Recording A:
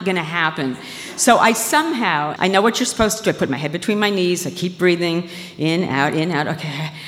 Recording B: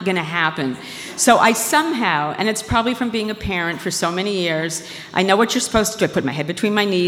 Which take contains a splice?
A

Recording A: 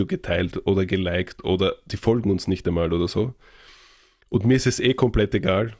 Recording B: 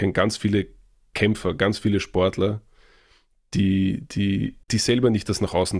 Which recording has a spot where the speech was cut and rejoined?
B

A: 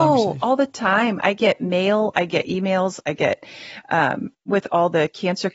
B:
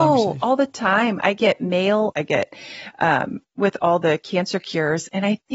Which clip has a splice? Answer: B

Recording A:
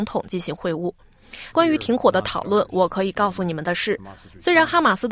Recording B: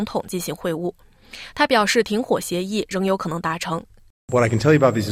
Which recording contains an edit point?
A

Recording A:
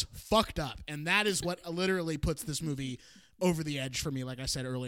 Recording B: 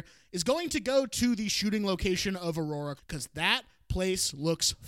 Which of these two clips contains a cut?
B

